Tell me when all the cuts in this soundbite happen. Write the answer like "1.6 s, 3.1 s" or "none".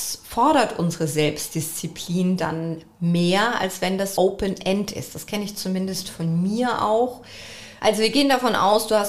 4.2 s, 7.8 s